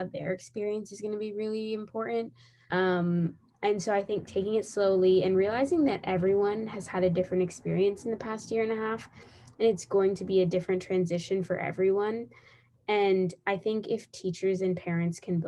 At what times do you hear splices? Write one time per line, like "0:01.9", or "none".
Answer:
0:02.7